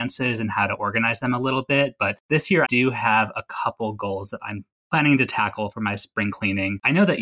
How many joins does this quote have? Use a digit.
1